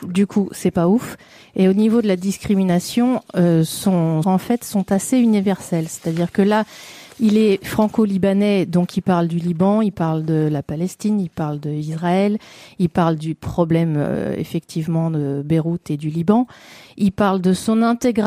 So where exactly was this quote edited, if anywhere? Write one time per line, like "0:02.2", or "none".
0:04.2